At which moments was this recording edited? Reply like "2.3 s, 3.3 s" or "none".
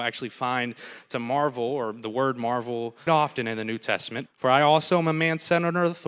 3.1 s, 4.3 s